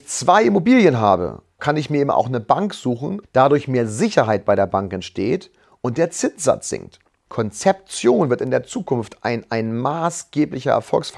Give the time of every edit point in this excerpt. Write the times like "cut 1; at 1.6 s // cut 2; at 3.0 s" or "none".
cut 1; at 1.6 s // cut 2; at 3.2 s // cut 3; at 7.3 s